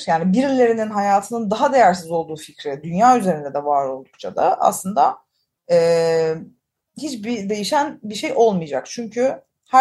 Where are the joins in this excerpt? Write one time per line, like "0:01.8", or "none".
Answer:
none